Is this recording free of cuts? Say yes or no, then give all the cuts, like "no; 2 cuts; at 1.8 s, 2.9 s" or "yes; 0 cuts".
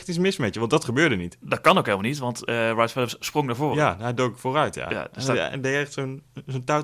yes; 0 cuts